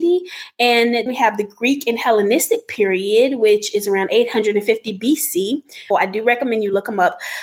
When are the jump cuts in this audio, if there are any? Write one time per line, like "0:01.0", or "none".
0:01.1
0:05.9